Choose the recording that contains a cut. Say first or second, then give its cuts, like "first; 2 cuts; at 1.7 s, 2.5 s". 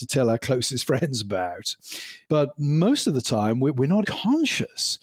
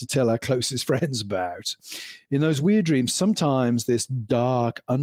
first; 2 cuts; at 2.2 s, 4.0 s